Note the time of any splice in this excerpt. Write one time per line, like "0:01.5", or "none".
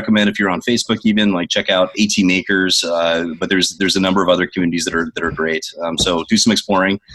none